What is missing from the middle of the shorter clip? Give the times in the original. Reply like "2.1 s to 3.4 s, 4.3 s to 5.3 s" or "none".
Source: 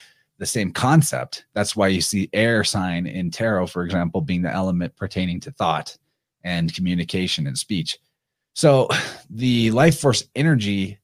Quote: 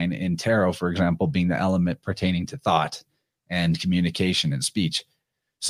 none